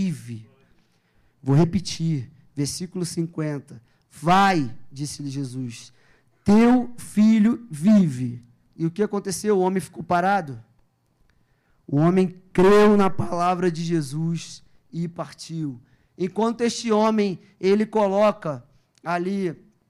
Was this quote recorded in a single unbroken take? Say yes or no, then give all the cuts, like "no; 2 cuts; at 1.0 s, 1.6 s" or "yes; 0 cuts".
yes; 0 cuts